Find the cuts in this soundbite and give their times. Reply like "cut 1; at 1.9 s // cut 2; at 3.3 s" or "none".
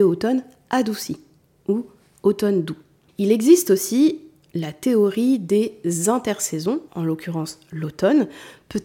cut 1; at 3.1 s // cut 2; at 6.9 s